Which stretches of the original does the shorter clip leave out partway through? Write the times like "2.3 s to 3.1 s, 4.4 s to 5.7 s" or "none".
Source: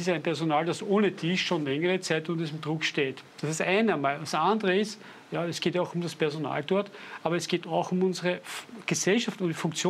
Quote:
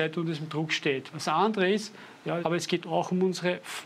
3.2 s to 4.2 s, 5.5 s to 7.2 s